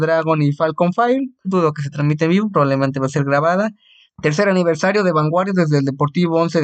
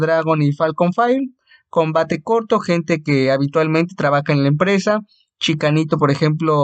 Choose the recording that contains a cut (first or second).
first